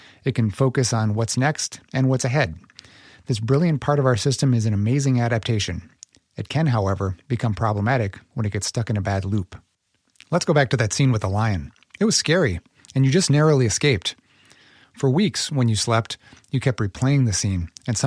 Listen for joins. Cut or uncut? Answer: uncut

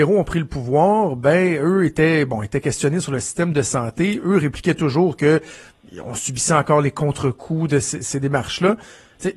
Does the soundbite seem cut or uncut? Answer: uncut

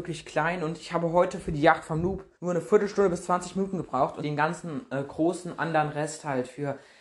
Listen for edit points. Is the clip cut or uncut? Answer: cut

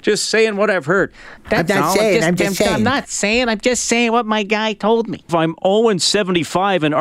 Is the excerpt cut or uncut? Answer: cut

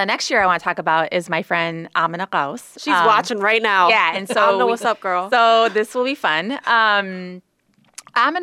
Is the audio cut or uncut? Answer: uncut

